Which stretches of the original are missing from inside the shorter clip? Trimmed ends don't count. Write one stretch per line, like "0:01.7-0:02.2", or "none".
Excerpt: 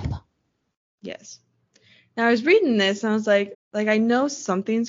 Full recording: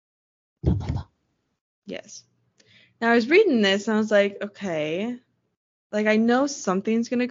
0:04.4-0:05.7